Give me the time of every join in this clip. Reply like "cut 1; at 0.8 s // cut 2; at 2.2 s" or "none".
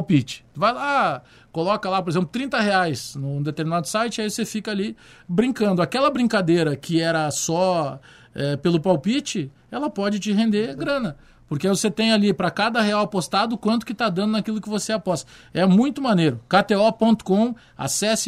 none

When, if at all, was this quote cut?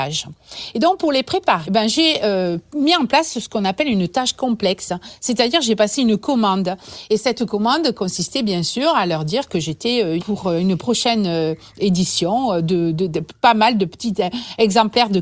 cut 1; at 1.6 s // cut 2; at 10.2 s

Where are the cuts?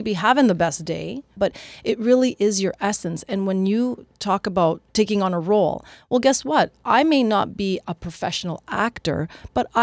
cut 1; at 1.4 s

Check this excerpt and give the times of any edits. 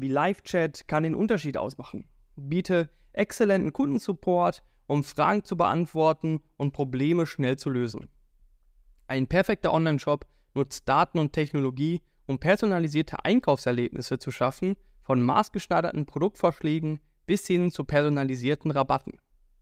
none

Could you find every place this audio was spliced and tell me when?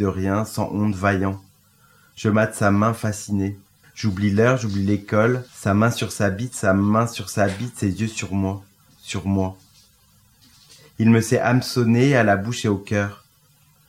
cut 1; at 3.8 s // cut 2; at 5.5 s

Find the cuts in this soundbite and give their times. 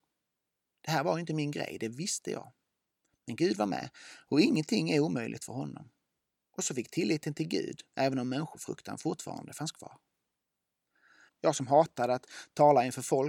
cut 1; at 7.9 s // cut 2; at 11.3 s

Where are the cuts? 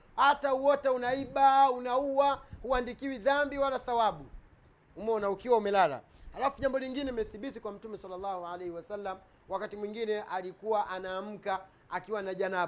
none

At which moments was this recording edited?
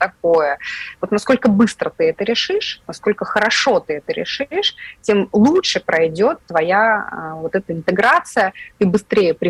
cut 1; at 0.9 s

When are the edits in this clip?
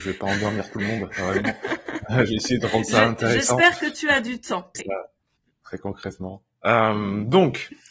cut 1; at 4.7 s

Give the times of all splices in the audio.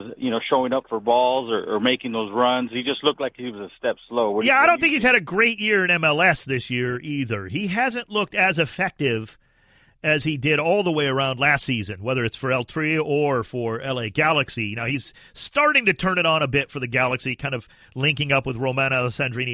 none

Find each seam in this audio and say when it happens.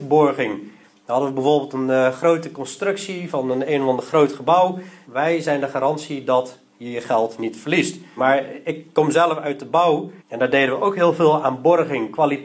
cut 1; at 5.0 s // cut 2; at 8.2 s // cut 3; at 10.2 s

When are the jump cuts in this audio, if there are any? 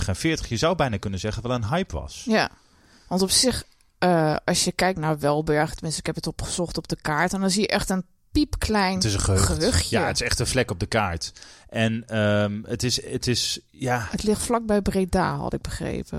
none

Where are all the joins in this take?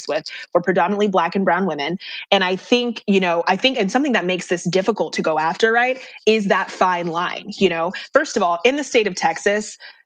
cut 1; at 2.3 s

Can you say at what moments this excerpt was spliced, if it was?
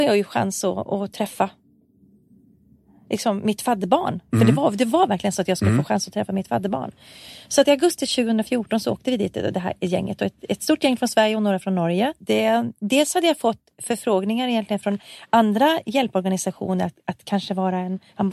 cut 1; at 12.2 s

